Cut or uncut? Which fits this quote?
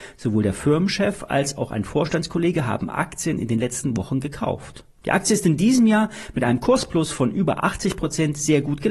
uncut